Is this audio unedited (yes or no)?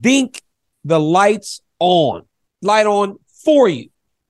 no